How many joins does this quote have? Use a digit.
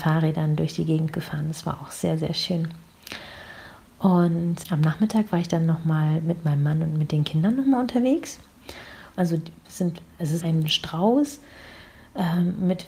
3